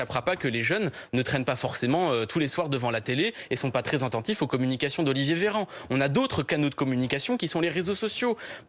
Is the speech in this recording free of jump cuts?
yes; 0 cuts

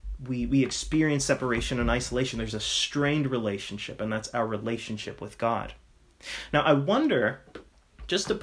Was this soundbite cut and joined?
no; 0 cuts

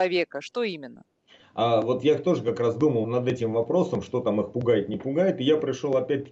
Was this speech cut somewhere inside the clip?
yes; 1 cut; at 3.0 s

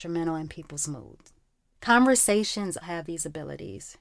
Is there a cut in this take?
yes; 2 cuts; at 1.7 s, 2.8 s

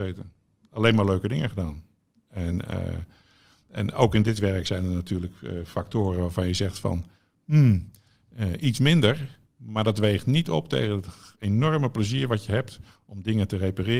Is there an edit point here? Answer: no; 0 cuts

